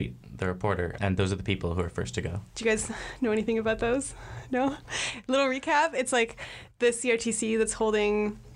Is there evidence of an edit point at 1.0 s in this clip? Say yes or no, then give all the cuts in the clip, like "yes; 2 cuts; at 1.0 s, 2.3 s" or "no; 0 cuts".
yes; 2 cuts; at 1.0 s, 2.5 s